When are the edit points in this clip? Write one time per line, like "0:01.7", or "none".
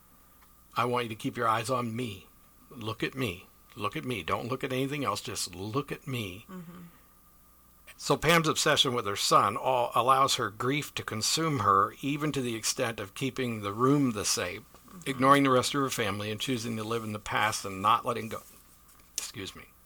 0:07.9